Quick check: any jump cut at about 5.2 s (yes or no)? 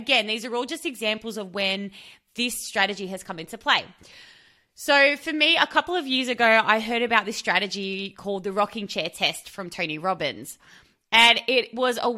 no